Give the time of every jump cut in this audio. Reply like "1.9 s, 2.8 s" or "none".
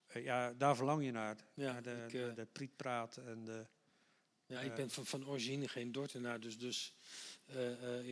none